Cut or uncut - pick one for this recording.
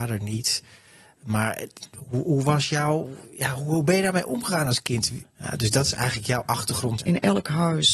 cut